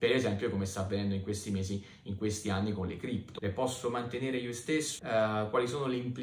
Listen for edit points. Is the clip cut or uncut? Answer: cut